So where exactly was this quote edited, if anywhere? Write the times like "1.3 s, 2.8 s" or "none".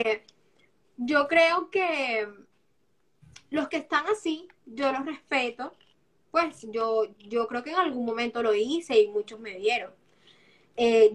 none